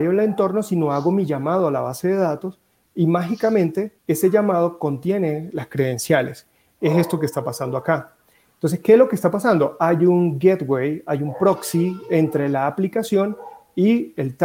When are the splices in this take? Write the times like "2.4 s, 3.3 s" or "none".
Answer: 4.0 s